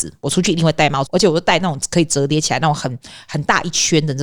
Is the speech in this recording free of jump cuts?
no; 1 cut; at 1.1 s

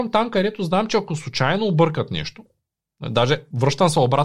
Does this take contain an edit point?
no; 0 cuts

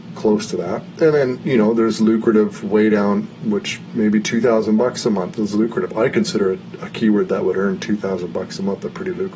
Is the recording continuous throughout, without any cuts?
no; 1 cut; at 5.4 s

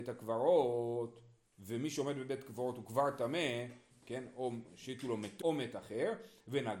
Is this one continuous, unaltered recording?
no; 2 cuts; at 3.9 s, 5.4 s

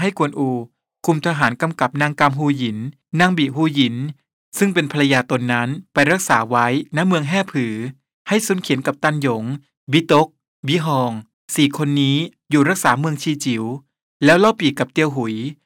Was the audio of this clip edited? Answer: no; 0 cuts

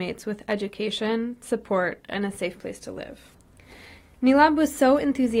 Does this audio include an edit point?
no; 0 cuts

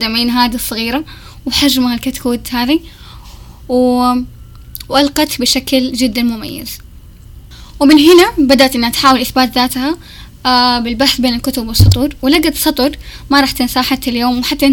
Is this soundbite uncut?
yes; 0 cuts

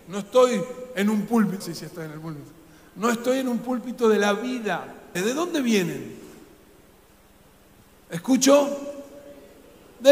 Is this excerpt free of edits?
no; 2 cuts; at 1.6 s, 5.1 s

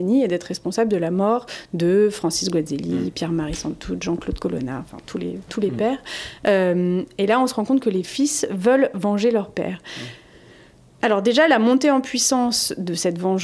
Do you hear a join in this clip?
no; 0 cuts

